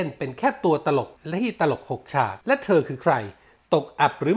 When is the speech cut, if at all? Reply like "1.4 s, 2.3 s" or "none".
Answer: 1.2 s, 2.4 s